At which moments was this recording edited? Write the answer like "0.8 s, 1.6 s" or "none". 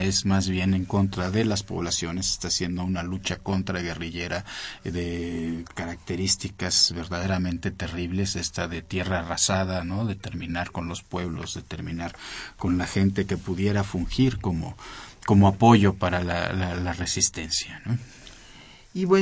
none